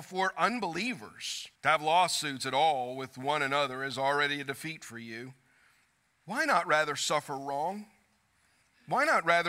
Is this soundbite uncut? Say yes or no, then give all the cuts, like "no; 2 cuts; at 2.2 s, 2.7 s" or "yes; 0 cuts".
no; 1 cut; at 1.6 s